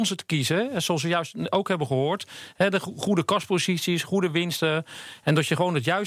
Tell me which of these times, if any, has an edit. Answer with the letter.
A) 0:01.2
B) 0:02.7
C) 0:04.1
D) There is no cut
D